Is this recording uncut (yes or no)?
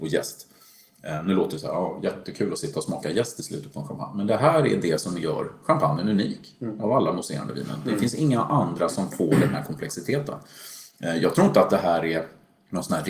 yes